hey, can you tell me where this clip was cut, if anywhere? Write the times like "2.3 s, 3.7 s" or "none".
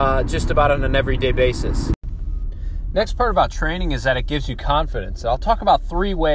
none